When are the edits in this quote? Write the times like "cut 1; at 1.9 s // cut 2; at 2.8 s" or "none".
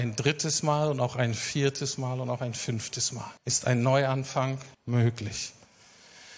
cut 1; at 3.4 s // cut 2; at 4.7 s